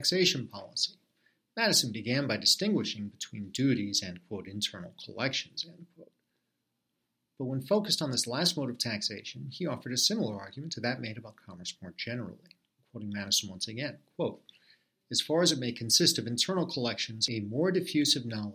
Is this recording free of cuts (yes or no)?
yes